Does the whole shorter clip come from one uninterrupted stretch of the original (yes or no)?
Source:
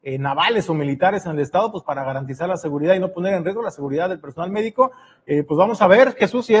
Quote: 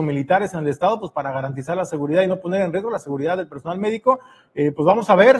yes